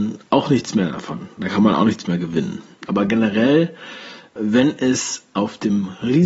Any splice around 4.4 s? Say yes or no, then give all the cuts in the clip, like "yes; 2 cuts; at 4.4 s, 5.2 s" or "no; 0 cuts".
yes; 2 cuts; at 2.9 s, 4.4 s